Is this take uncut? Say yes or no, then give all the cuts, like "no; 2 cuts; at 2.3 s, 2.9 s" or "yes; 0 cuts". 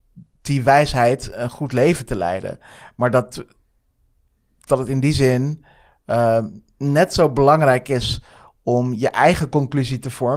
yes; 0 cuts